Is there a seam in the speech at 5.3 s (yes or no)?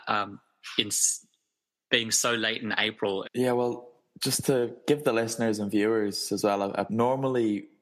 no